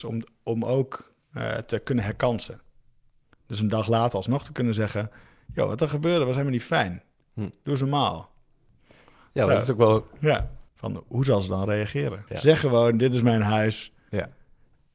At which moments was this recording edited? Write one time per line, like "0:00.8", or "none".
0:10.7
0:12.3

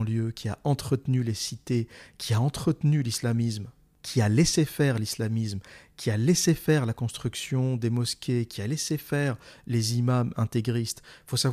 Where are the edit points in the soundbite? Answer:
none

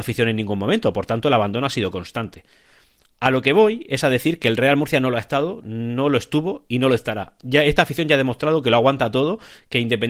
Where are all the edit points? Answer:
none

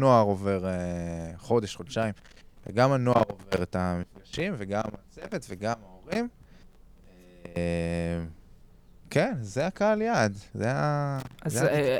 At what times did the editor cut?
0:10.5

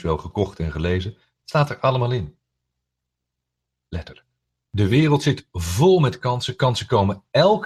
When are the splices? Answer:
none

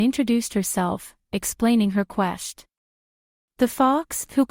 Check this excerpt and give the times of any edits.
none

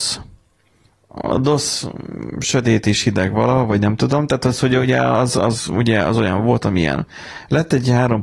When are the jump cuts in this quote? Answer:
none

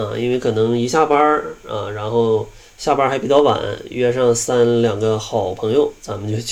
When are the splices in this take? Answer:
none

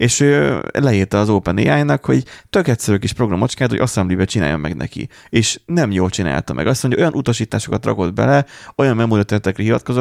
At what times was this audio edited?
none

